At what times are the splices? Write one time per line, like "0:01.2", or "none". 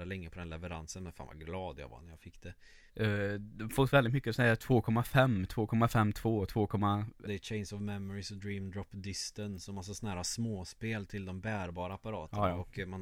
0:02.9
0:07.2